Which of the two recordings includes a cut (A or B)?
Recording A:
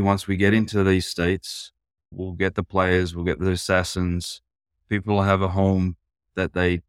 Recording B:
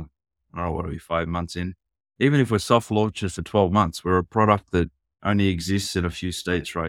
A